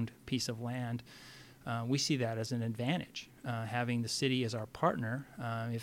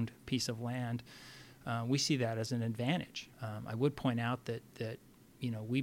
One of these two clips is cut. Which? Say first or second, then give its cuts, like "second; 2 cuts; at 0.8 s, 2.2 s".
second; 1 cut; at 3.3 s